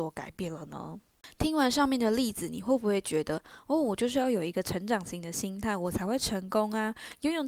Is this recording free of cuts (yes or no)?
yes